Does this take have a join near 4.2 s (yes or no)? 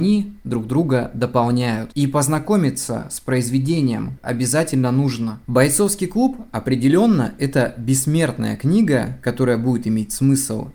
yes